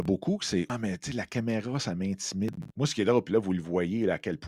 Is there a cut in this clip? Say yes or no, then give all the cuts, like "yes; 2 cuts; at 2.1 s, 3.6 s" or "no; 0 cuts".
yes; 1 cut; at 2.7 s